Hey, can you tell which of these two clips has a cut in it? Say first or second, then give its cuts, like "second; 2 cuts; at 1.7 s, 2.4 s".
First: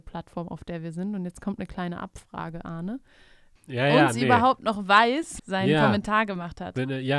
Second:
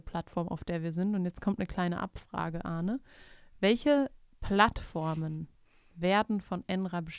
first; 2 cuts; at 3.6 s, 5.4 s